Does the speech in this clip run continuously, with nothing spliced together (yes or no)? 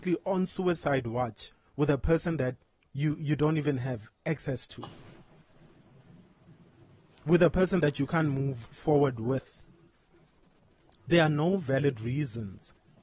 yes